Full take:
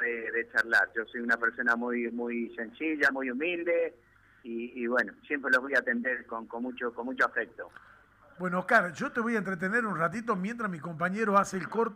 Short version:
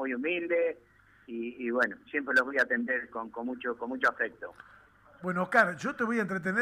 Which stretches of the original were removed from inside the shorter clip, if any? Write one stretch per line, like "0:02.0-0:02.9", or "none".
none